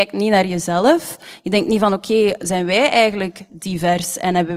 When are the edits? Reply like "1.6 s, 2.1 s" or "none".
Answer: none